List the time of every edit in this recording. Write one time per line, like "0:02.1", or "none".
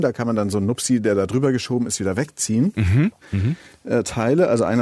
0:03.2